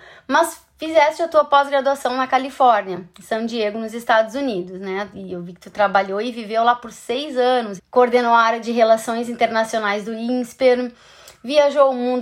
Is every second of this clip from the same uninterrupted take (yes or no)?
no